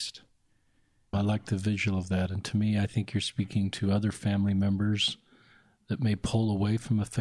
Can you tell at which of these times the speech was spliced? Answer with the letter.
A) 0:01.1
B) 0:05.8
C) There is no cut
A